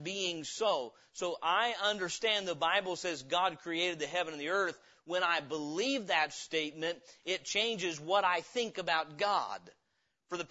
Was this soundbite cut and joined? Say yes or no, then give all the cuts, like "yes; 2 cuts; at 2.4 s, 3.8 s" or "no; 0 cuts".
no; 0 cuts